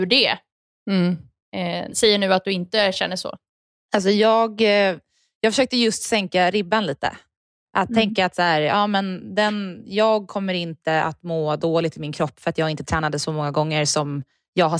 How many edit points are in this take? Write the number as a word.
one